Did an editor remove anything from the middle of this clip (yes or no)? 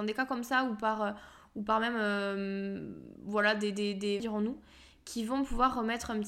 yes